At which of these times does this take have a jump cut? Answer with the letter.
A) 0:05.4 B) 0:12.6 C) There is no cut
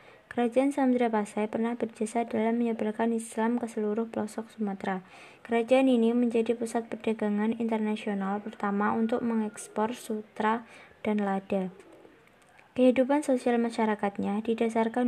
A